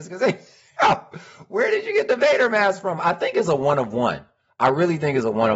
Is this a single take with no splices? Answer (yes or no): yes